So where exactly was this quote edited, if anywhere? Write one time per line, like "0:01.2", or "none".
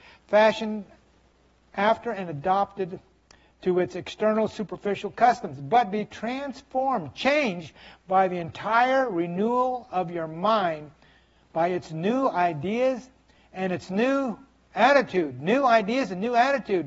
none